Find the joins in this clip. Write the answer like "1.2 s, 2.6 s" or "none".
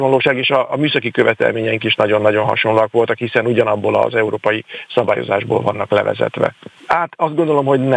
6.8 s